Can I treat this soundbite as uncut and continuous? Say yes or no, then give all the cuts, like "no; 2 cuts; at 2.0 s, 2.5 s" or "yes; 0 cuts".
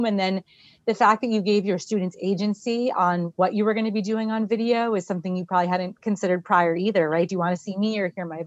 yes; 0 cuts